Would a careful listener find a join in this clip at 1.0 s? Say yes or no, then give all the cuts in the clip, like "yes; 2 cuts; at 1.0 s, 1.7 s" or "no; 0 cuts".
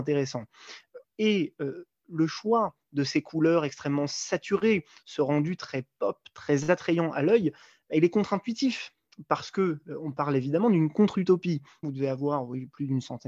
yes; 2 cuts; at 1.0 s, 11.8 s